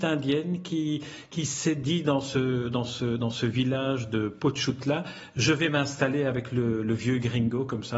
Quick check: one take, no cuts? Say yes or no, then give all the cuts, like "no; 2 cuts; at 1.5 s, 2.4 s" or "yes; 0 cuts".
yes; 0 cuts